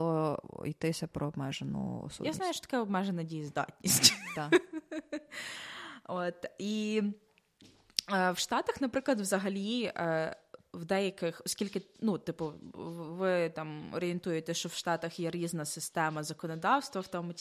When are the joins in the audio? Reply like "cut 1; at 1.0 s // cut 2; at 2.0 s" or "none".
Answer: none